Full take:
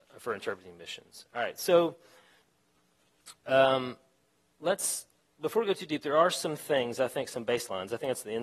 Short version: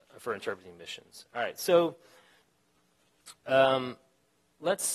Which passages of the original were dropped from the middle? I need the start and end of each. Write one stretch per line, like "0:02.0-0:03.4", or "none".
none

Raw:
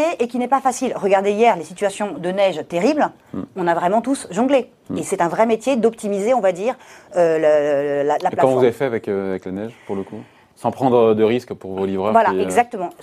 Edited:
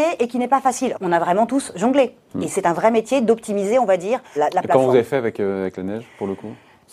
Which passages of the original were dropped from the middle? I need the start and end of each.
0:00.9-0:03.5
0:06.9-0:08.0

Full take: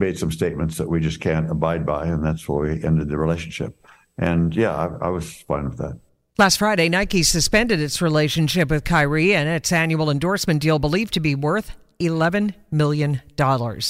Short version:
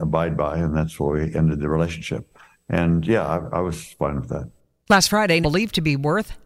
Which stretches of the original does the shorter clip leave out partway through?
0:06.9-0:10.8

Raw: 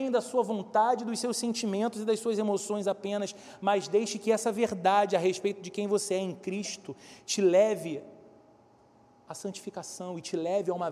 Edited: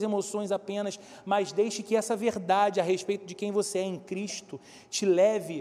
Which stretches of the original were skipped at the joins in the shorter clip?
none

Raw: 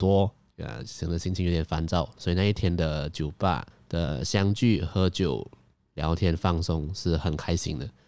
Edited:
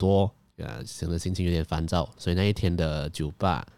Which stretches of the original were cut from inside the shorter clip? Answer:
none

